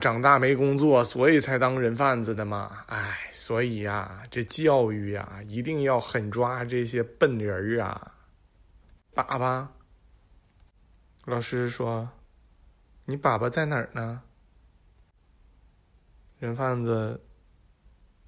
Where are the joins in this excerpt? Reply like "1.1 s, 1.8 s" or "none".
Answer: 9.1 s